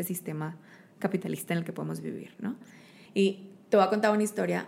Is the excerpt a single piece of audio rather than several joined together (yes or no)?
no